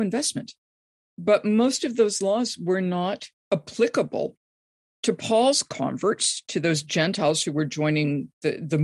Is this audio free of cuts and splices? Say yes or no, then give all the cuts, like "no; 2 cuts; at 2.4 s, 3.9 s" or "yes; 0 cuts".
yes; 0 cuts